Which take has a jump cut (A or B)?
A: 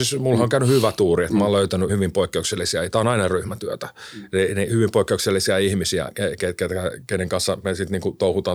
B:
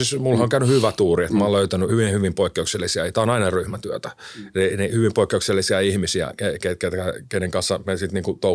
A